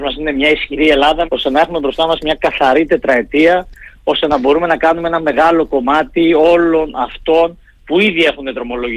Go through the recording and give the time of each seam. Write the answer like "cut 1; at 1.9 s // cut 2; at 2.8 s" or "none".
cut 1; at 1.3 s